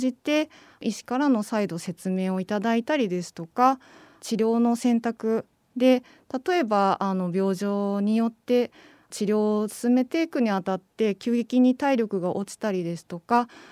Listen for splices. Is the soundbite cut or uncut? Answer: uncut